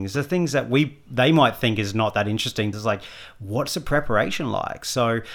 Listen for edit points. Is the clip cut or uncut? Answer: cut